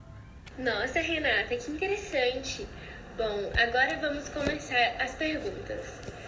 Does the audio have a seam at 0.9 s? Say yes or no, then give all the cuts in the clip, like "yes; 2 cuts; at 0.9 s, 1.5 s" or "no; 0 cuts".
no; 0 cuts